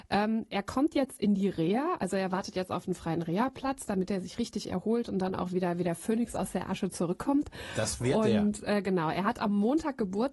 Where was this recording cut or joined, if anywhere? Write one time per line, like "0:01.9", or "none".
none